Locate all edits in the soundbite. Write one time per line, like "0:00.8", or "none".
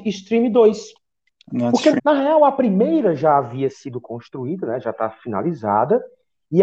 0:02.0